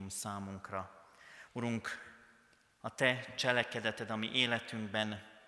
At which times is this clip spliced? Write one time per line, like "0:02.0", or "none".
0:01.5